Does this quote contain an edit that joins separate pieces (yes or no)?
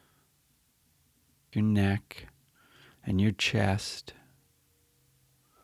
yes